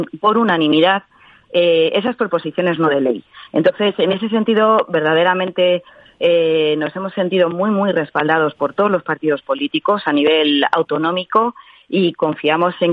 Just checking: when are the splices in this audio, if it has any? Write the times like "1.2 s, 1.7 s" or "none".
none